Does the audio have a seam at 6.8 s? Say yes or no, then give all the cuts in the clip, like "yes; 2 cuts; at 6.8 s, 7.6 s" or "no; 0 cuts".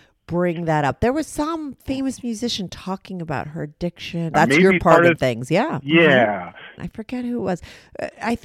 yes; 2 cuts; at 4.3 s, 6.8 s